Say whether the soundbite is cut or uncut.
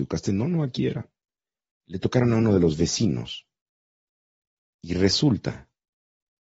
uncut